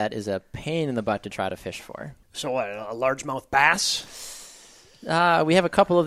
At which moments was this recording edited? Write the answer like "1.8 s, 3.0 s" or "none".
2.2 s